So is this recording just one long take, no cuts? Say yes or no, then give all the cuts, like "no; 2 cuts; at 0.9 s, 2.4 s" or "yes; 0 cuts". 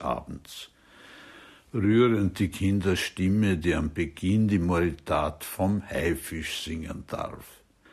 yes; 0 cuts